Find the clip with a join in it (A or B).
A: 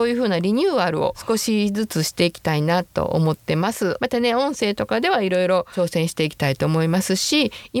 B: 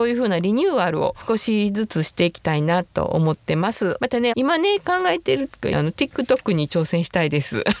B